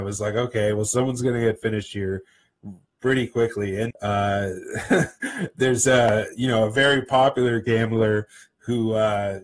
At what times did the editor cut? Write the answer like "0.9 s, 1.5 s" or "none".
3.9 s